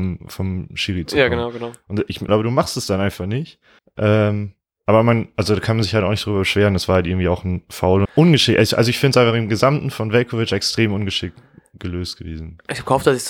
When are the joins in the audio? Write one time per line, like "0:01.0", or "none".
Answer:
0:02.3
0:03.8
0:08.1

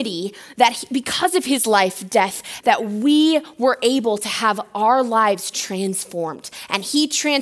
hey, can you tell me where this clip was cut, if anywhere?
0:02.6

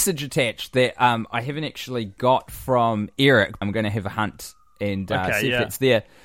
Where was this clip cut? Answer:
0:03.6

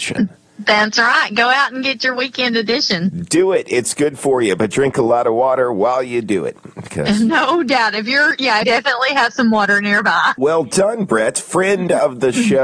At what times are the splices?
0:08.6
0:10.4

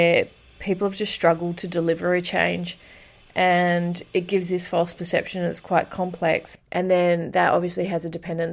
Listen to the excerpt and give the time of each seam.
0:06.5

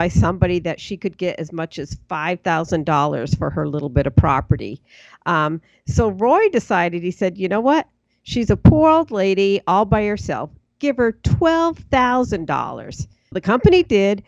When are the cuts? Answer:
0:13.3

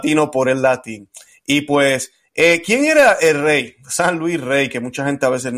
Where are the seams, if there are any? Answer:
none

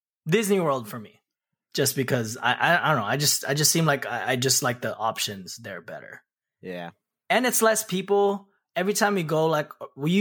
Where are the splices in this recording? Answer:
none

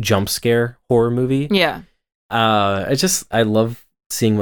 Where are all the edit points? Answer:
0:02.2

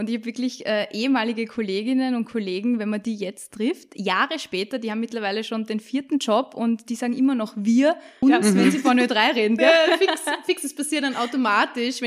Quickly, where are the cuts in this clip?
0:08.2
0:09.6

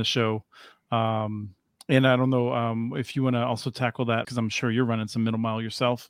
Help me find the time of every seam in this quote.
0:04.2

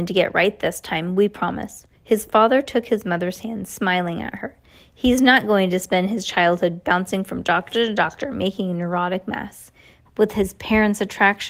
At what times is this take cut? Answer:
0:01.9
0:10.1

